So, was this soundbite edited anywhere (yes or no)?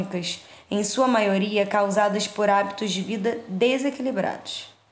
no